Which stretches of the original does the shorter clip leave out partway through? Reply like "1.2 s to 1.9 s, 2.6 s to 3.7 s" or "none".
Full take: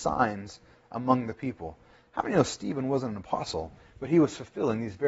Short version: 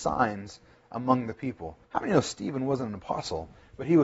1.8 s to 2.1 s